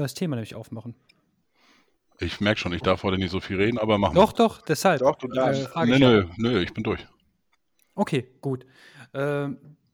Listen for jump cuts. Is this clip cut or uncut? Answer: cut